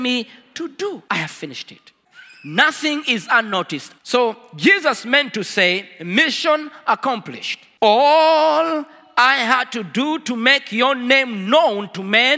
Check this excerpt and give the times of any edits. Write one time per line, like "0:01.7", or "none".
0:04.0